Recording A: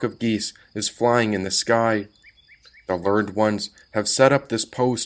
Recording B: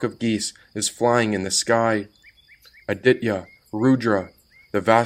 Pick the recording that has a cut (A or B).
B